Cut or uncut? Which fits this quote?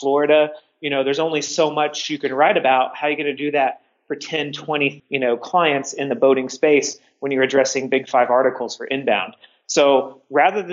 cut